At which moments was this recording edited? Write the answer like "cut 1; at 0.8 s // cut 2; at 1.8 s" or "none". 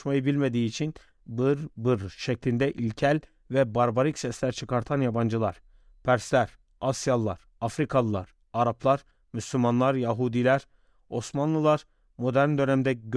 cut 1; at 1.2 s